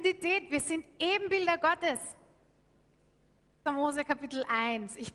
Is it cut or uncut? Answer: cut